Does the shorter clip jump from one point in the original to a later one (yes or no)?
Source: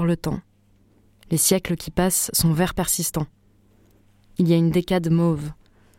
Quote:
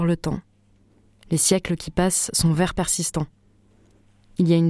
no